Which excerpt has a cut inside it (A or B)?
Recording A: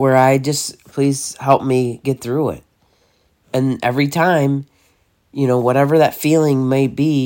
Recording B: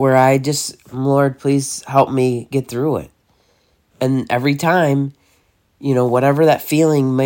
A